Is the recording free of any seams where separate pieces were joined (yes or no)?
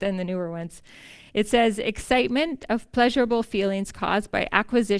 yes